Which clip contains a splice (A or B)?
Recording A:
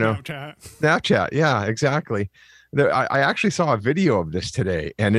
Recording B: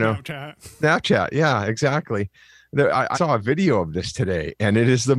B